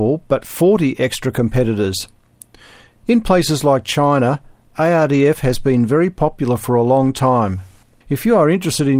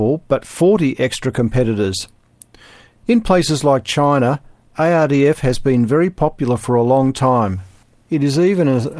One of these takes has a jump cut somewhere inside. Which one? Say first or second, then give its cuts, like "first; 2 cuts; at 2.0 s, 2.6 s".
first; 1 cut; at 8.0 s